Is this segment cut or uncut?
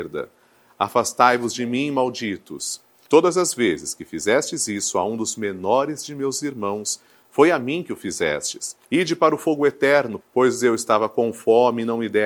cut